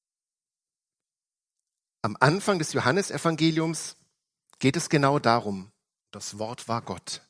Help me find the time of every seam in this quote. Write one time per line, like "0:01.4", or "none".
0:06.0